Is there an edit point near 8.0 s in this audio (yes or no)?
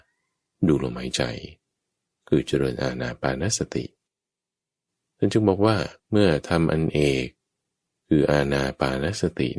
no